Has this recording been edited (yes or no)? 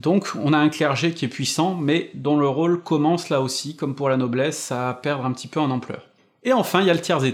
no